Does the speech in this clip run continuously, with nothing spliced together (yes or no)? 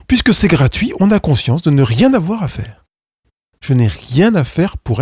yes